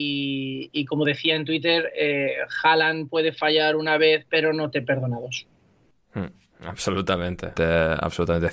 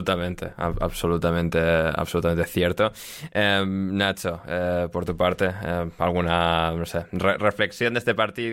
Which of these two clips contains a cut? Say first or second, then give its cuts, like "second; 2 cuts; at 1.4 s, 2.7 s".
first; 1 cut; at 7.6 s